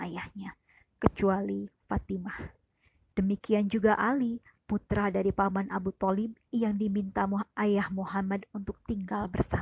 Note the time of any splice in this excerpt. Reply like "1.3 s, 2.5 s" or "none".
3.1 s